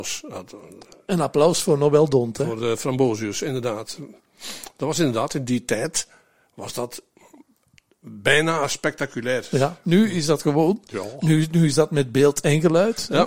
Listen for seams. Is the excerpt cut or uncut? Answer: uncut